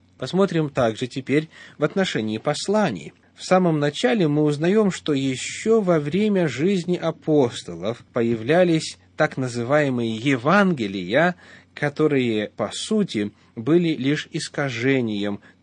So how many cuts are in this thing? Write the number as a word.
one